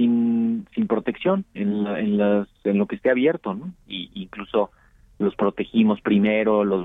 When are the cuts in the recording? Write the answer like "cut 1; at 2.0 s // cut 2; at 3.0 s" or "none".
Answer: cut 1; at 1.6 s // cut 2; at 3.8 s